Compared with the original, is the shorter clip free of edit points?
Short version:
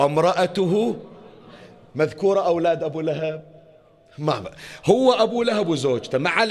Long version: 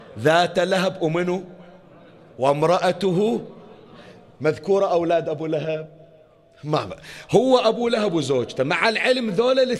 yes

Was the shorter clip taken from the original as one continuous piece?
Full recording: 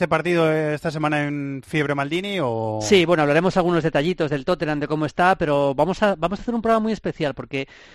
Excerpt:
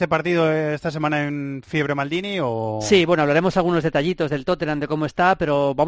yes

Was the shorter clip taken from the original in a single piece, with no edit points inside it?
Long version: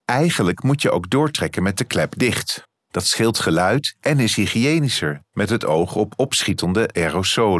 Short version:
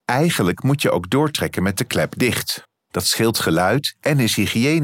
yes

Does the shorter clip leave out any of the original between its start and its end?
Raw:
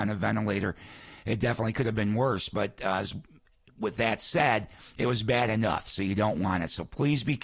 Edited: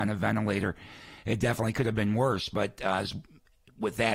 no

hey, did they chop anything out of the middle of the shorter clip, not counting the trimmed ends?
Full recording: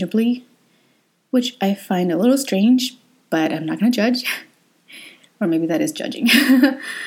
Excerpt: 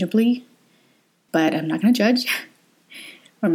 yes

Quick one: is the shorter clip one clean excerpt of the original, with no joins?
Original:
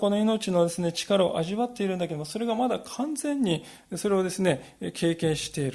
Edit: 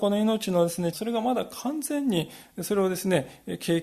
no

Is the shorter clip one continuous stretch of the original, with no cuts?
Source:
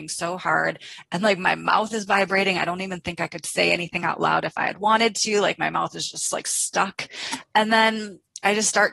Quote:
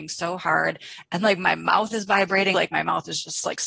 no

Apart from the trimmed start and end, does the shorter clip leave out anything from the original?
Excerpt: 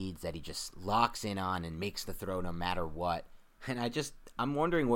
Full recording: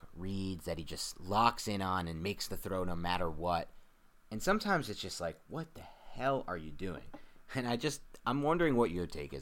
yes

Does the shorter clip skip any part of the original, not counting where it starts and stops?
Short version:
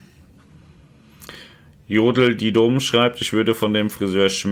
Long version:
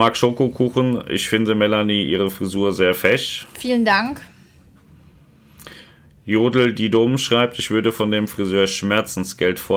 no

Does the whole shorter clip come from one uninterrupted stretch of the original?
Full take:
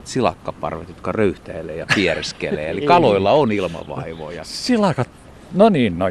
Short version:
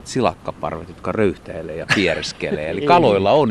yes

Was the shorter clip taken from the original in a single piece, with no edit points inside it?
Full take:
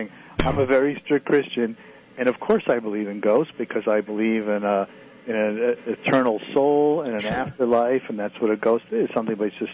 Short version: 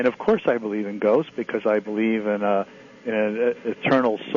yes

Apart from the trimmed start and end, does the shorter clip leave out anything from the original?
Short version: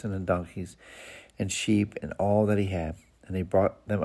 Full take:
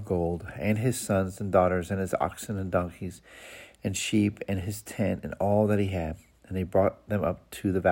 yes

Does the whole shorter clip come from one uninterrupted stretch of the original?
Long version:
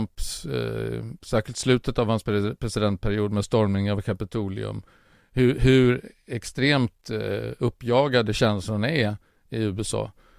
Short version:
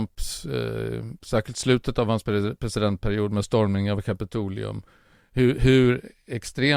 yes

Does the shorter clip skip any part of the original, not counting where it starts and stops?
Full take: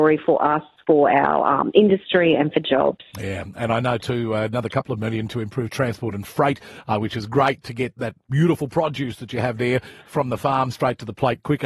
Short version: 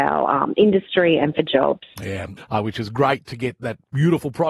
yes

